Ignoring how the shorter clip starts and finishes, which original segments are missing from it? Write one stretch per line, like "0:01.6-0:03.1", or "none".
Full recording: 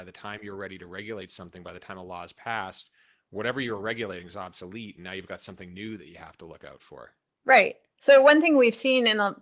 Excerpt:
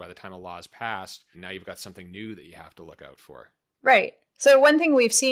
0:03.0-0:04.9